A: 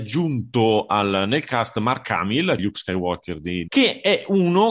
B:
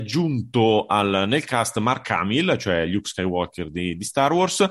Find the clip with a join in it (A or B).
A